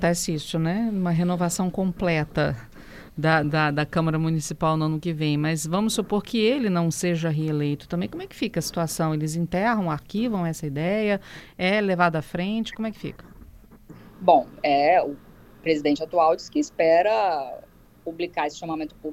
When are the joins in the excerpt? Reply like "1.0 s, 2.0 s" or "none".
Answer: 3.4 s